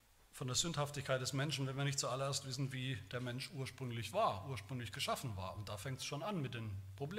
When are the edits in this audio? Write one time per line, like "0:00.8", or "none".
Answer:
none

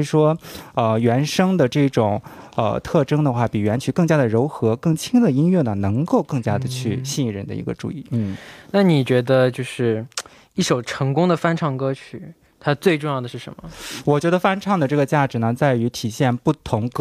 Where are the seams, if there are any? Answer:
none

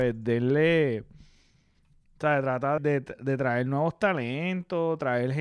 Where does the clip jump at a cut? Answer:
0:02.8

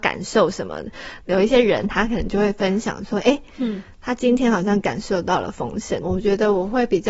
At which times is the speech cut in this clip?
0:01.2
0:06.0

